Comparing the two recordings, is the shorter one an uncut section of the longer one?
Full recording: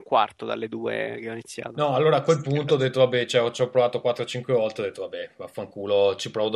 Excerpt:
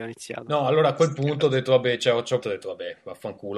no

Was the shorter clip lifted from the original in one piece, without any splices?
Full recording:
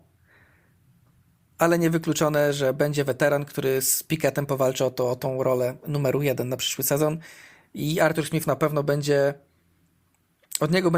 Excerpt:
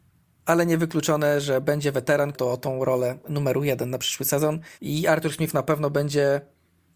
no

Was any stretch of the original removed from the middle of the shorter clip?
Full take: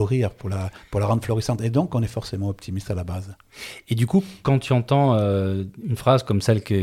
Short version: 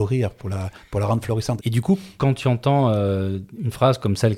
yes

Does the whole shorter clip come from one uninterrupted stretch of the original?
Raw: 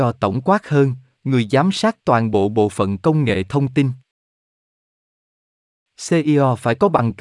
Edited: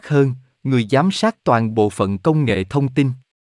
no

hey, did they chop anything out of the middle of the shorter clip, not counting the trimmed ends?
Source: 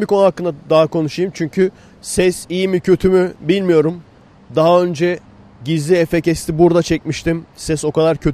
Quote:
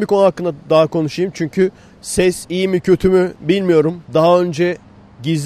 yes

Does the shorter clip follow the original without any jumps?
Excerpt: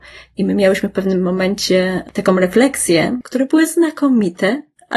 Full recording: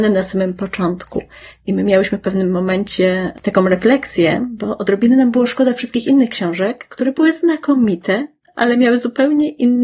no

